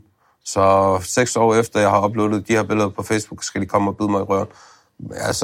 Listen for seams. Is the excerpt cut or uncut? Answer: uncut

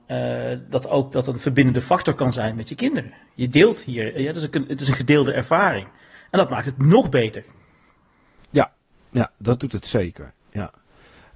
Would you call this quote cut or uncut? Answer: uncut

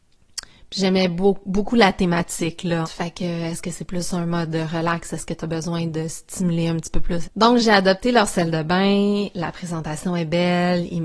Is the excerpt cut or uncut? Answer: cut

